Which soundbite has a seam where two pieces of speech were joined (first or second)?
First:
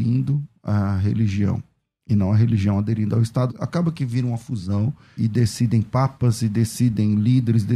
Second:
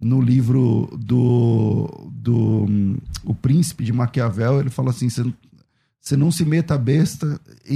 first